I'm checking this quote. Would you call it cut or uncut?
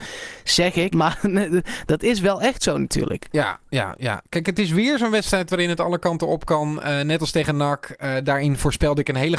cut